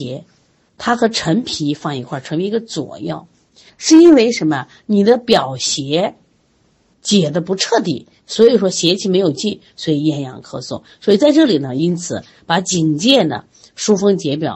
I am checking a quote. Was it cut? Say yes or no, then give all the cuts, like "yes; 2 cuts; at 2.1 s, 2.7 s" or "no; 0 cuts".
yes; 1 cut; at 3.7 s